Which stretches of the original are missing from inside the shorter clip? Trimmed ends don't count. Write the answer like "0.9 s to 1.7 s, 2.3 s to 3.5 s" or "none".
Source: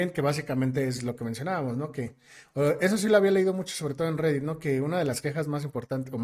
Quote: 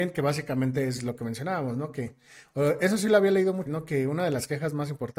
3.7 s to 4.4 s